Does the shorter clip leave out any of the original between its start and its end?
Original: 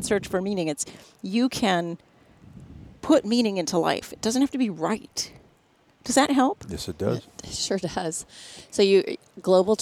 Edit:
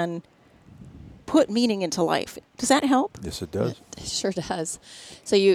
yes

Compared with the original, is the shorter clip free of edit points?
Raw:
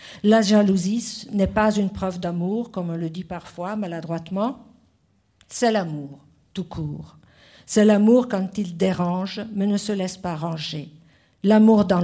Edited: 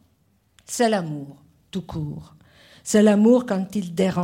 yes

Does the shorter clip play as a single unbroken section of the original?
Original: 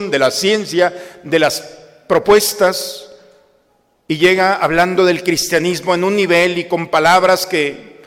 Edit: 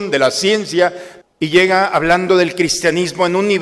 no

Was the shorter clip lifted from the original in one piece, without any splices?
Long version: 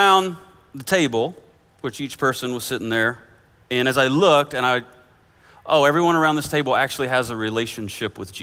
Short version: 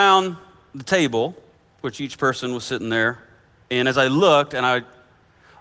yes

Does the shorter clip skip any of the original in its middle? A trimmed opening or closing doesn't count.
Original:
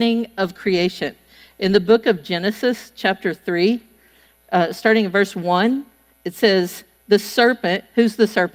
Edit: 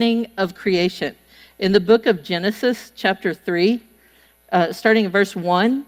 no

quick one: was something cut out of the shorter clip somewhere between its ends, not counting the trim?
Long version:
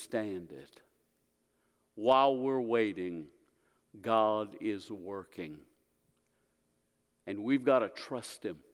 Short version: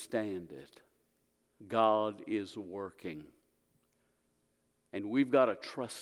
yes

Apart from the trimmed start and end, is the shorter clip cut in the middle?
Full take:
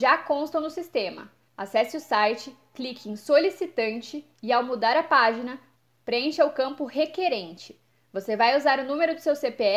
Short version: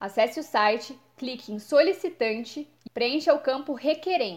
yes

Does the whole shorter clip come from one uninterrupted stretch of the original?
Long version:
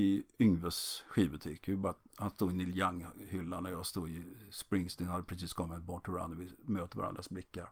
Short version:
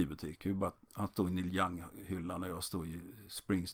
yes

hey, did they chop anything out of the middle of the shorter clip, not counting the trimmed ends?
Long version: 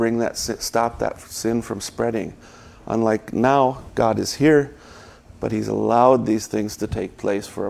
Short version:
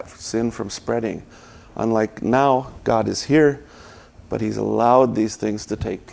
no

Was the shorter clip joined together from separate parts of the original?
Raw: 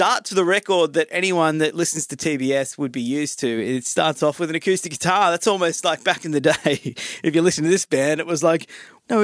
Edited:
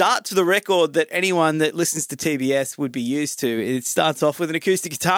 no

